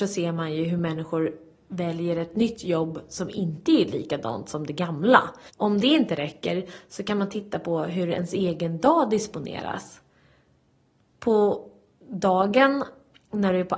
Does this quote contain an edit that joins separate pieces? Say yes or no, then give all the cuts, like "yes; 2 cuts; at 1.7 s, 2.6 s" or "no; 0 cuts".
yes; 1 cut; at 5.5 s